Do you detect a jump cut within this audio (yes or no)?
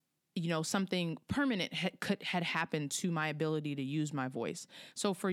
no